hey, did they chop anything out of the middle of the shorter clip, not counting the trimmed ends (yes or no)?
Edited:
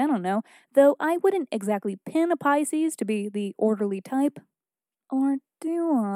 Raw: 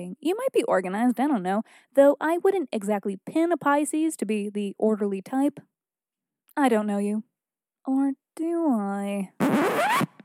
yes